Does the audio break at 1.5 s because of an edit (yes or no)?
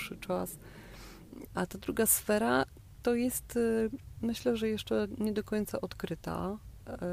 yes